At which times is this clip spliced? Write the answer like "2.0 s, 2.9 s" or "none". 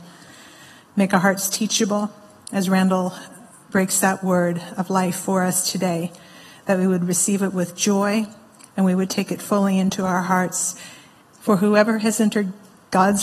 11.2 s

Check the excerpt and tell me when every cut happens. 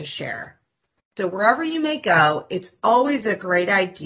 none

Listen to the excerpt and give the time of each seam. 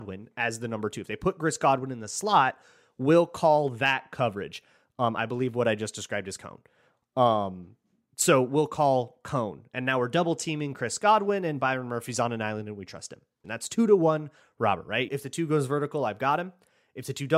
13.4 s, 15.1 s

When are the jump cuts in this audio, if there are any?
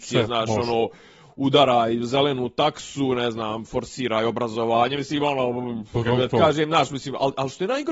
none

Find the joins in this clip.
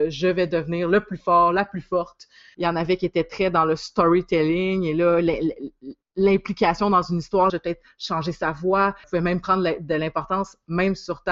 2.5 s, 7.5 s, 9.0 s

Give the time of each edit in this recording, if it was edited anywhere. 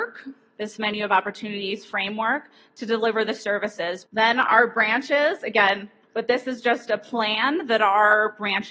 4.1 s, 6.0 s

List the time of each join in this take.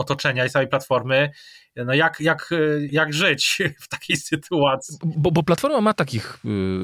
2.9 s

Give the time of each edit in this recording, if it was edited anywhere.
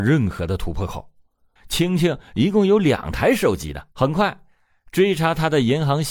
1.6 s, 3.9 s

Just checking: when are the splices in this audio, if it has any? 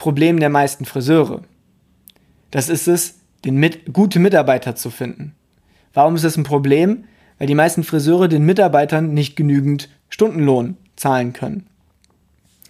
none

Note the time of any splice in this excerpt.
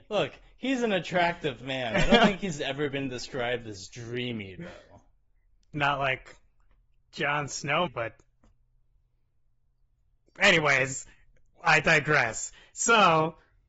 7.9 s

